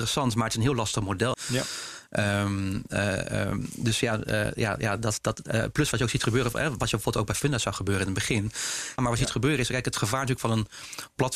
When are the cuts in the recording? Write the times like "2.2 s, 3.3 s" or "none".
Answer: 1.3 s, 9.0 s